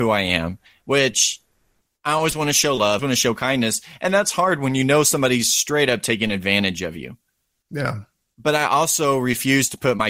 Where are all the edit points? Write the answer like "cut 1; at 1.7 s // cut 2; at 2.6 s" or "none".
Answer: cut 1; at 3.0 s